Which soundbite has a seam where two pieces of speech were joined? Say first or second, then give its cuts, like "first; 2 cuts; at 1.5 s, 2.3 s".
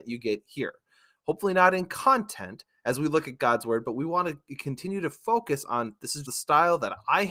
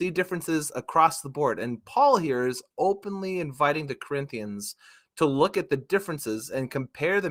first; 1 cut; at 6.2 s